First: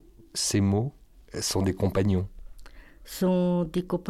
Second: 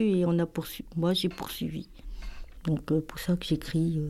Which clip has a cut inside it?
second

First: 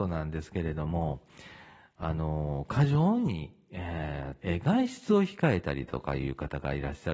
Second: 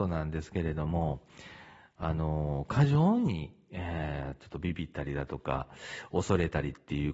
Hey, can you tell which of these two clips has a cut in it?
first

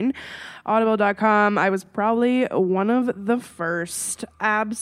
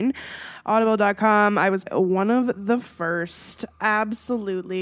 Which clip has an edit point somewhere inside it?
second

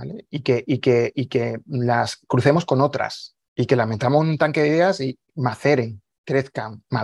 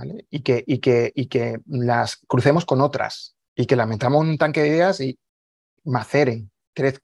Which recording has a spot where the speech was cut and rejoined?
first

